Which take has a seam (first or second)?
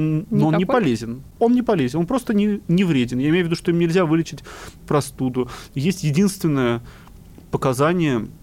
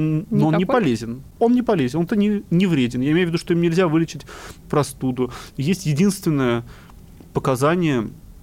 second